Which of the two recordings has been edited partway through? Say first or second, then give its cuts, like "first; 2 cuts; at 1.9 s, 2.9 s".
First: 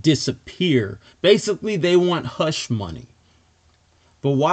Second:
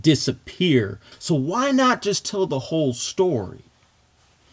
second; 1 cut; at 1.1 s